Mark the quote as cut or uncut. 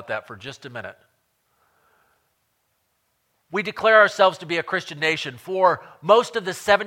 uncut